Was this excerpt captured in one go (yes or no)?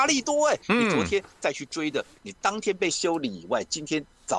no